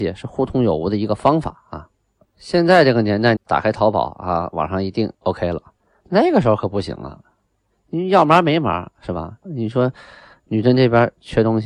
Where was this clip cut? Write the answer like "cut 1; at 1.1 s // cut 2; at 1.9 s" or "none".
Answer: cut 1; at 3.4 s // cut 2; at 9.4 s